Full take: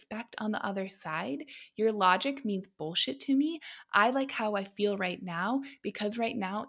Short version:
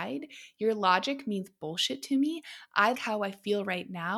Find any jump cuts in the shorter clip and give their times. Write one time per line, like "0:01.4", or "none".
0:02.9

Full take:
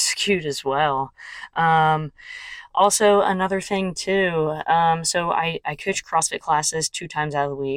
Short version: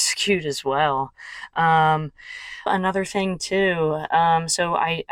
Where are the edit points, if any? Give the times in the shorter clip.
0:02.7

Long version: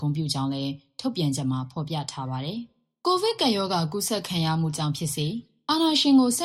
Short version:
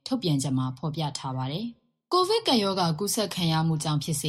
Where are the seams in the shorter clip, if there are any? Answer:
none

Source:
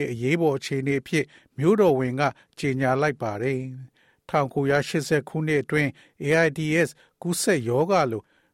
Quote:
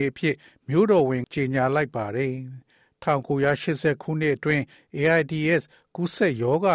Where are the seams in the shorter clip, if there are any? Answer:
0:01.2

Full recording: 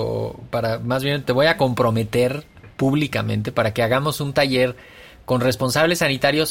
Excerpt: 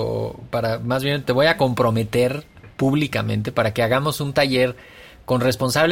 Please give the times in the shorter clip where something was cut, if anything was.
none

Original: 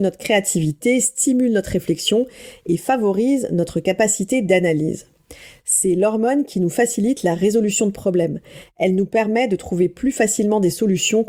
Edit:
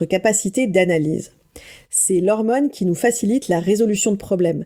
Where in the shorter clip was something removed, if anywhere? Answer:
none

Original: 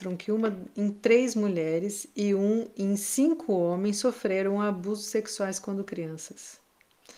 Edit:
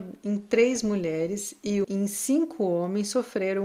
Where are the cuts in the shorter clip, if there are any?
0:01.8

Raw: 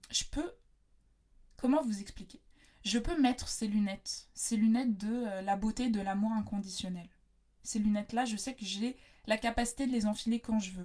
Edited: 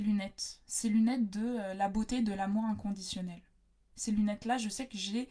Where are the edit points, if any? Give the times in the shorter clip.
none

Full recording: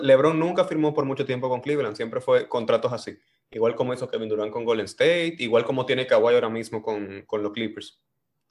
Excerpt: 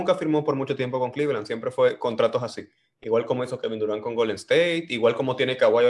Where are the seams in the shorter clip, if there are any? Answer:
none

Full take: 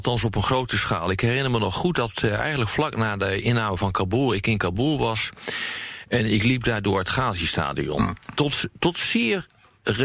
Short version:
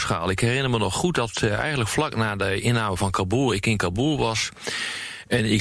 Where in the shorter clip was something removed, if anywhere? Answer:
none

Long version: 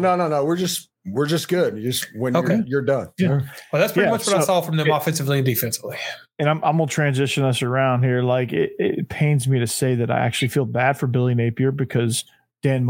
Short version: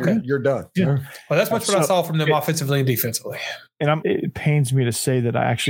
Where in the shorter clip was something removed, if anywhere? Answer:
0:01.5
0:04.0

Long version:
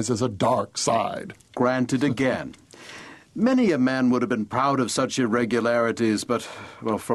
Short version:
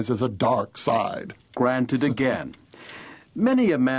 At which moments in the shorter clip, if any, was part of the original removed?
none

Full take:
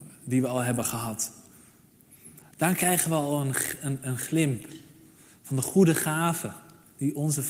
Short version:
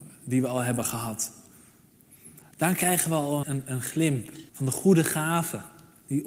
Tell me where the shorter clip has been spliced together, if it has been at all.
0:03.4
0:04.5

